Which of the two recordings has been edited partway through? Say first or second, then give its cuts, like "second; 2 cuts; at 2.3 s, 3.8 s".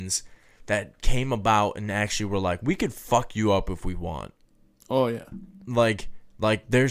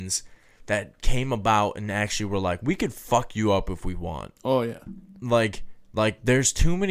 second; 1 cut; at 4.4 s